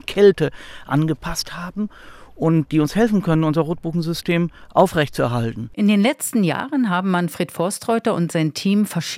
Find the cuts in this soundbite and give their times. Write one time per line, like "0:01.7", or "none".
0:02.7